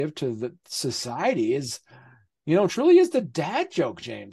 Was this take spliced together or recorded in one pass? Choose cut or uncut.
uncut